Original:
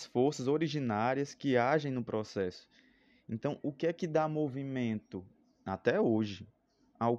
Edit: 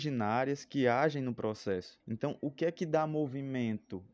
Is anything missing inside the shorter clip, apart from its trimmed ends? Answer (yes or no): yes